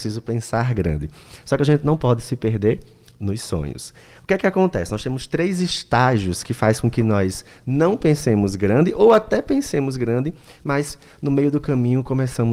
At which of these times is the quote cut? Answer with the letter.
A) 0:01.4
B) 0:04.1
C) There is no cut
C